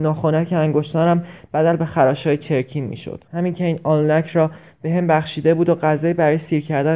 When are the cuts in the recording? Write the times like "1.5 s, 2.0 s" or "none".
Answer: 3.3 s